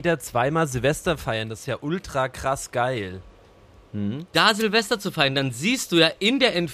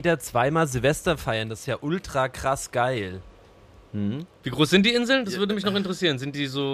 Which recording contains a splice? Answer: first; 1 cut; at 4.3 s

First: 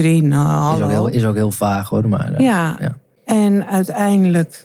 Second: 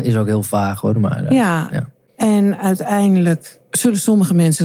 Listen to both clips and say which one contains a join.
second; 1 cut; at 3.6 s

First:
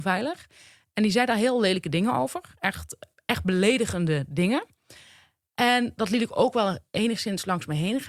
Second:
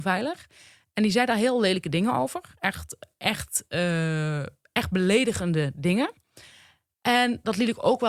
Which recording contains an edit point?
first; 1 cut; at 3.1 s

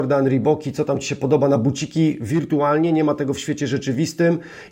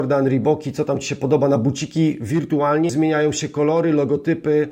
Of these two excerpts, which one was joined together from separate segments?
second; 1 cut; at 2.9 s

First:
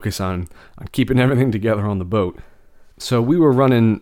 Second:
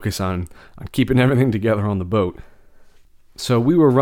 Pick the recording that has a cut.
first; 1 cut; at 2.9 s

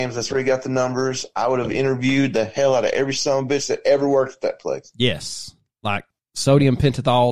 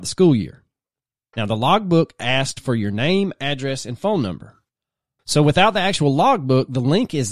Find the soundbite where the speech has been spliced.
second; 2 cuts; at 1.3 s, 5.2 s

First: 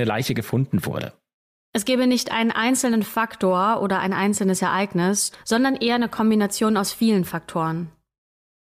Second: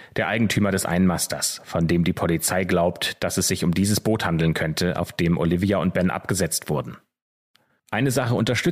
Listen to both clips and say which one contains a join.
first; 2 cuts; at 1.6 s, 5.3 s

